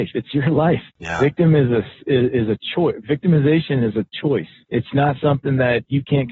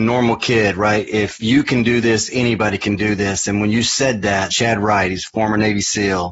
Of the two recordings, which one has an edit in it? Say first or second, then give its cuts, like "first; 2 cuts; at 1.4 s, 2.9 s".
second; 1 cut; at 4.5 s